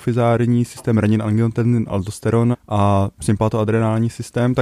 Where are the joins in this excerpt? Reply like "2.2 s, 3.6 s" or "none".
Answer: 2.5 s